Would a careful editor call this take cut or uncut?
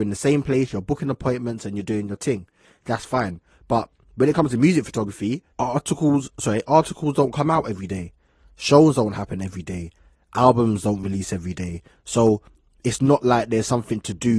cut